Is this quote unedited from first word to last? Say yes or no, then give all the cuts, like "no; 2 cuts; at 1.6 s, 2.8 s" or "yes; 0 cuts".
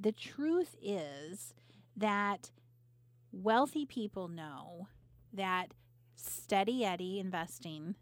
yes; 0 cuts